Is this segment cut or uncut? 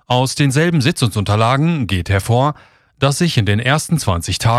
uncut